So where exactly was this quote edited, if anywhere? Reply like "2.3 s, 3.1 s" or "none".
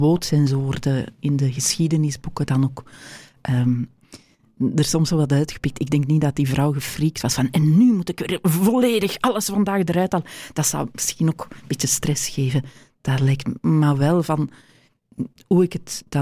none